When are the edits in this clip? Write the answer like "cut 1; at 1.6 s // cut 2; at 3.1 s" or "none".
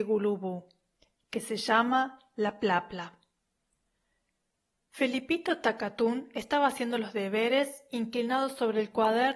none